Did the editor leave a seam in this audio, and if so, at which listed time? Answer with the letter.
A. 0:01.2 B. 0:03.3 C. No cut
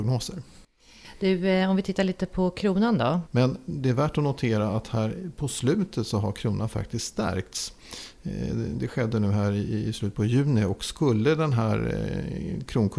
B